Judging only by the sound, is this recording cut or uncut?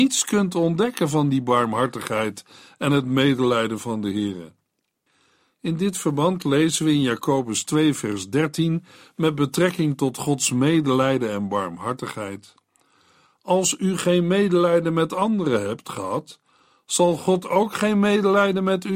uncut